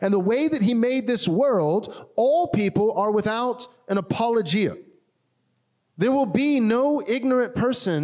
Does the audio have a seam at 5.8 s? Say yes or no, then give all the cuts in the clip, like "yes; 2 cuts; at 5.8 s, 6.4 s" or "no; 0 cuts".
yes; 1 cut; at 5.8 s